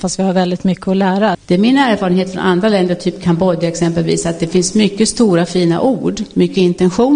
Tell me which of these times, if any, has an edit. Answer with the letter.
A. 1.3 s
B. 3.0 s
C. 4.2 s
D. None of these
A